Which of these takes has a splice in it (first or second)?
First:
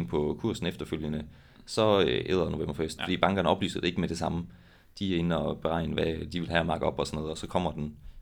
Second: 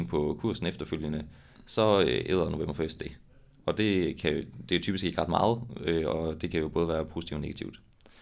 first